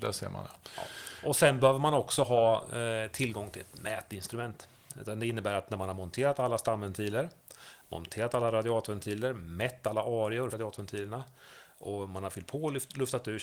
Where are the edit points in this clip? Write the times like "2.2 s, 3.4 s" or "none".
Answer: 4.9 s, 10.5 s